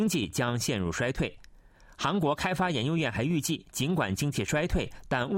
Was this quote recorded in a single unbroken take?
yes; 0 cuts

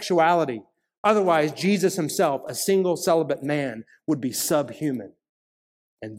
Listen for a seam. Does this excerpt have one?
no; 0 cuts

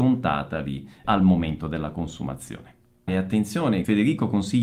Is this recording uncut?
no; 2 cuts; at 1.0 s, 3.1 s

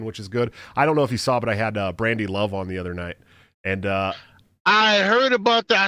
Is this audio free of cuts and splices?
yes; 0 cuts

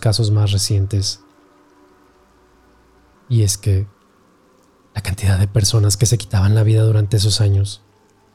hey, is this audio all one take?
no; 1 cut; at 3.1 s

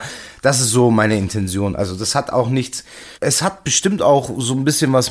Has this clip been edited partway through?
yes; 1 cut; at 3.1 s

